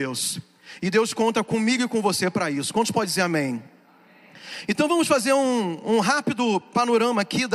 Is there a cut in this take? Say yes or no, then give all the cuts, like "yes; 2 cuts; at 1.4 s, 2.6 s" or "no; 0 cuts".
no; 0 cuts